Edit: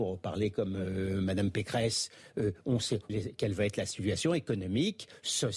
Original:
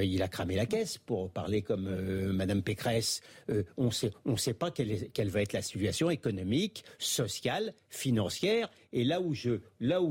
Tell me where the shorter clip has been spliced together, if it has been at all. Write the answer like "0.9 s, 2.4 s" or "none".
3.1 s